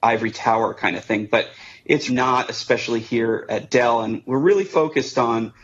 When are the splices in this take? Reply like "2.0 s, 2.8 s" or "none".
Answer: 2.1 s